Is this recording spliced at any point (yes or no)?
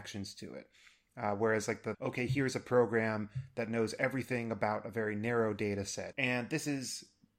yes